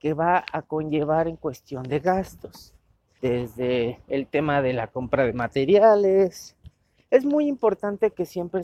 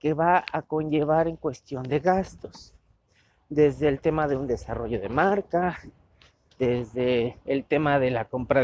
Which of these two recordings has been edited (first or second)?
first